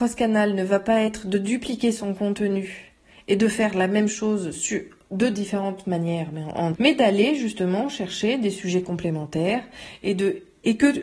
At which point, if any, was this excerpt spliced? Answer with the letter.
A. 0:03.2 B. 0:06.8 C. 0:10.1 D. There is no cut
B